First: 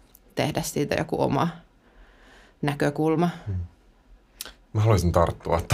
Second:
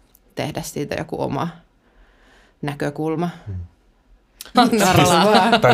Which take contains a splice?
second; 1 cut; at 4.5 s

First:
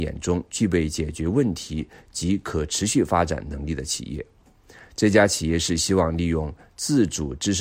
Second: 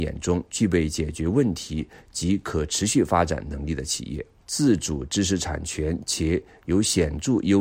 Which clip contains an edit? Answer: second; 1 cut; at 4.4 s

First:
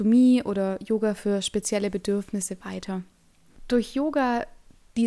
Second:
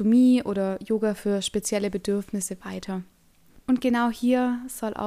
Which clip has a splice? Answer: second; 1 cut; at 3.6 s

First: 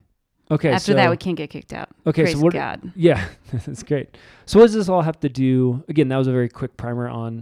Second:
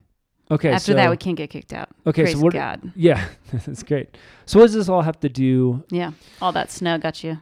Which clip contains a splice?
second; 1 cut; at 5.9 s

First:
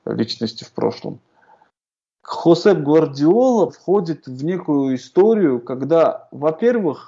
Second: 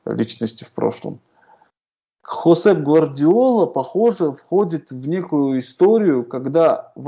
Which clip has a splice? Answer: first; 1 cut; at 3.7 s

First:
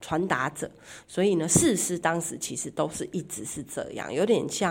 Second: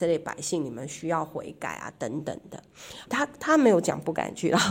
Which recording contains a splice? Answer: second; 1 cut; at 3.1 s

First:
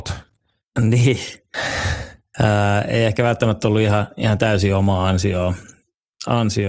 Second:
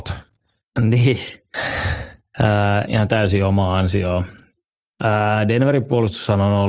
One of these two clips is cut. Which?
second; 2 cuts; at 2.8 s, 4.8 s

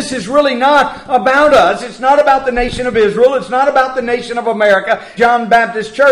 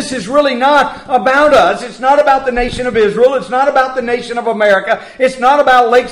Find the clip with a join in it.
first; 1 cut; at 5.2 s

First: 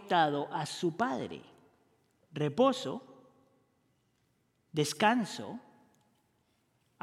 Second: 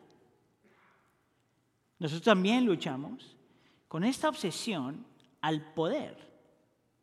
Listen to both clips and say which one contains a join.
second; 1 cut; at 1.8 s

